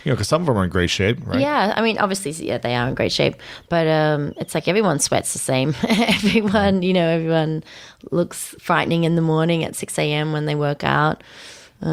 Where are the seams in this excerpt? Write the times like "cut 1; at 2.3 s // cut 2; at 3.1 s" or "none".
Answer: none